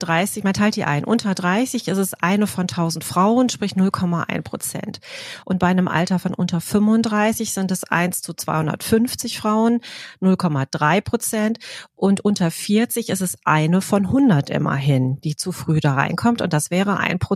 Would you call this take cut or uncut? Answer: uncut